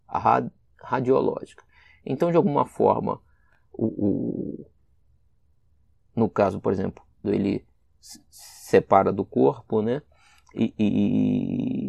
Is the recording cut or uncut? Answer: cut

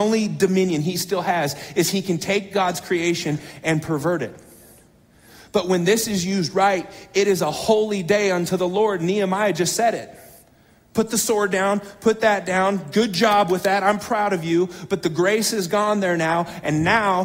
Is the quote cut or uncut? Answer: uncut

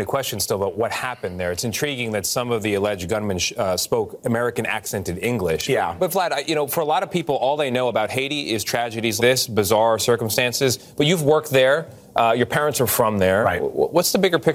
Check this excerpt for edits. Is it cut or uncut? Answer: cut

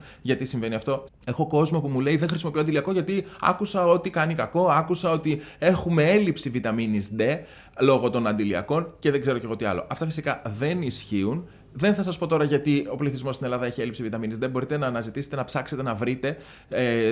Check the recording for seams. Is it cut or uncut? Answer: cut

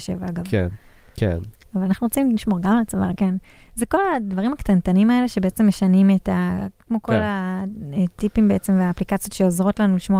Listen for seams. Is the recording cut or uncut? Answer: cut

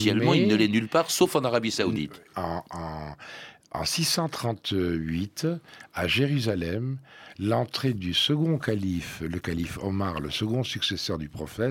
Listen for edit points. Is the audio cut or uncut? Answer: cut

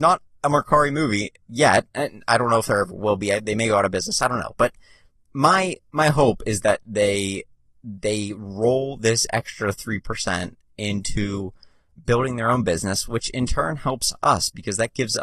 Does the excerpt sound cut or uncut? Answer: uncut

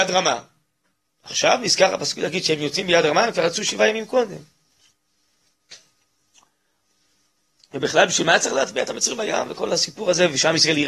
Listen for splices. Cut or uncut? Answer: uncut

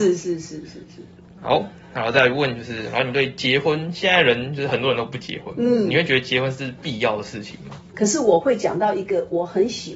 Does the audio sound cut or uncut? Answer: cut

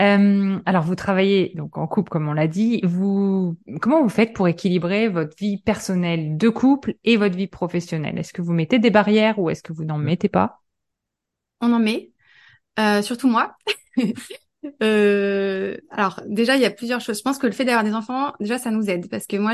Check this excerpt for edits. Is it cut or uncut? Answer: uncut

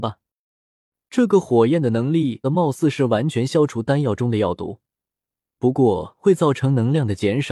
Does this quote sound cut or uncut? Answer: cut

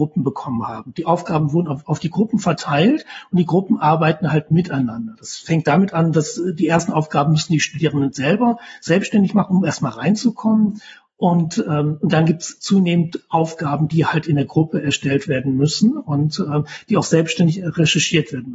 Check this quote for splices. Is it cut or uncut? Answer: uncut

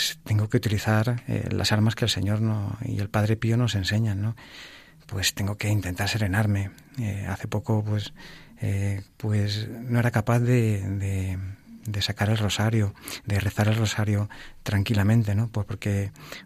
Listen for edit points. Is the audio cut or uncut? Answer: cut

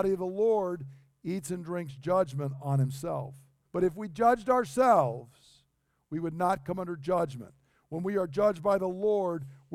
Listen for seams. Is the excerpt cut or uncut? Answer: cut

